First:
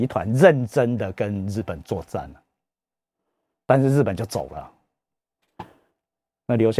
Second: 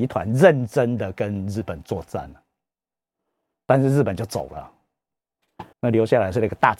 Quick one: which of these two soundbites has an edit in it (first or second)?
second